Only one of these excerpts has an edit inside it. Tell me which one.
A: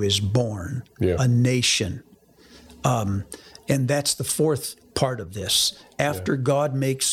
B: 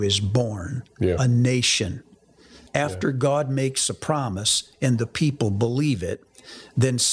B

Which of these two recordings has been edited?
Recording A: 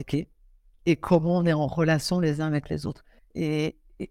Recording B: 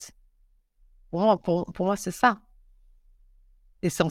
A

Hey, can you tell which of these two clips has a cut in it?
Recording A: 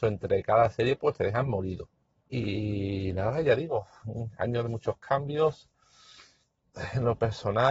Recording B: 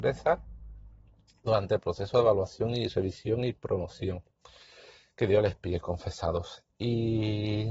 A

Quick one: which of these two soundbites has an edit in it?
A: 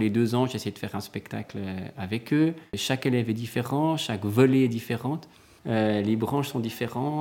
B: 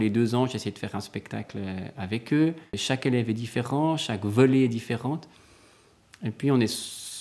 A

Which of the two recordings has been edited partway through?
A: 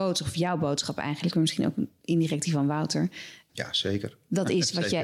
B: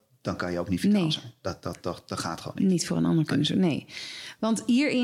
A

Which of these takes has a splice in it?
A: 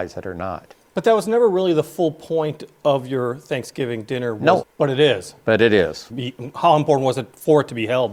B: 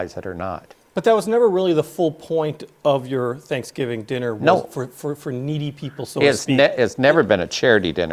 A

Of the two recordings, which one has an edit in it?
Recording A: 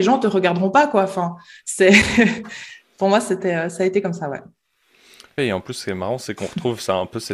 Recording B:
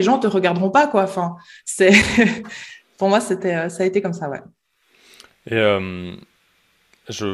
A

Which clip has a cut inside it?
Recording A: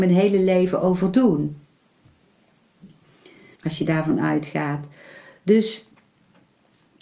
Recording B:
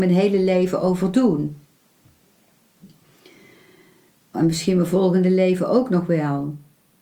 A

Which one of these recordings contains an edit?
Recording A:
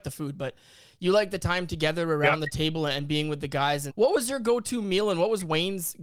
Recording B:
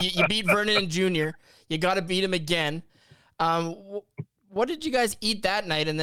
A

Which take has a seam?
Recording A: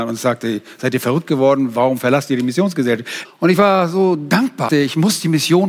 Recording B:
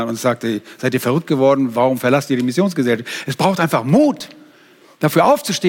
A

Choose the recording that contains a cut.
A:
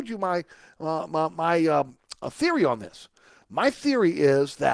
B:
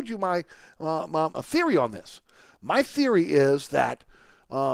B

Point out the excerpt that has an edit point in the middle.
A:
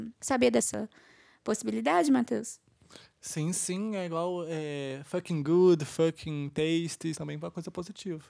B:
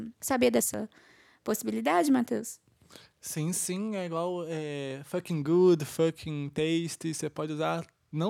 A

